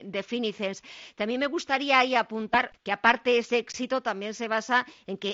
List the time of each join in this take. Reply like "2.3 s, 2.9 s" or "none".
2.7 s